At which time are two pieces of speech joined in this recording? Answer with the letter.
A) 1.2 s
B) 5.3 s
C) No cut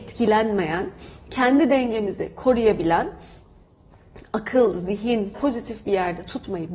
B